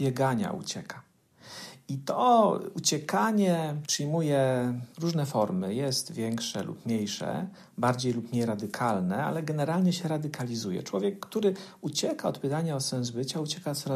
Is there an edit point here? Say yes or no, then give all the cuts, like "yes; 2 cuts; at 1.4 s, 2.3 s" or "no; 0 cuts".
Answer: no; 0 cuts